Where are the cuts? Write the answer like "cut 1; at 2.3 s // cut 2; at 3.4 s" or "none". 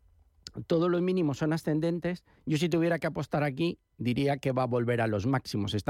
none